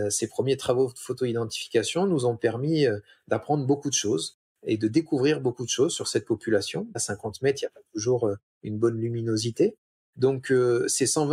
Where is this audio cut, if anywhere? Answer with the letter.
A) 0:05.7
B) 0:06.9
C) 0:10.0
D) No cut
B